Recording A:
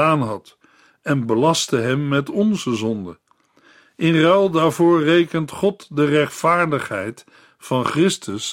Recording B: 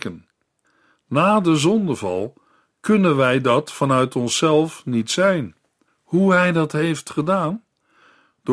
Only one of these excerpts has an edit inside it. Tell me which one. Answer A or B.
B